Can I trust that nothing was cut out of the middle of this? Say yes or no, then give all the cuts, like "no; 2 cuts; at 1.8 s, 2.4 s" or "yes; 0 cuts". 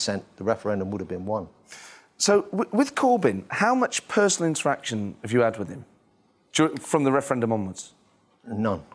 yes; 0 cuts